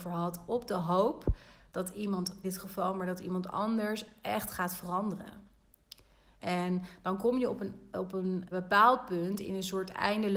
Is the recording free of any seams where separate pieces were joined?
no; 3 cuts; at 2.4 s, 6.4 s, 8.5 s

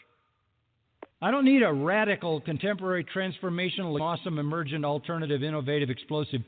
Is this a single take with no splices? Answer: no; 2 cuts; at 1.1 s, 4.0 s

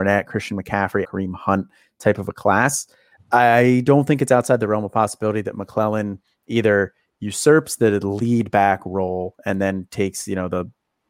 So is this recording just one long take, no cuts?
no; 2 cuts; at 1.0 s, 3.1 s

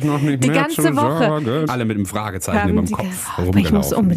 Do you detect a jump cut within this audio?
yes; 1 cut; at 1.7 s

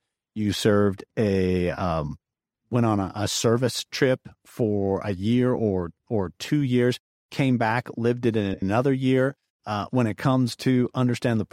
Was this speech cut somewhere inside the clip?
yes; 1 cut; at 9.5 s

